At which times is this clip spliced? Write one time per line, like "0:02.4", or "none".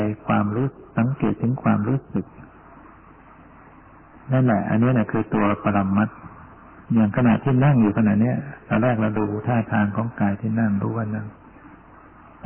0:06.8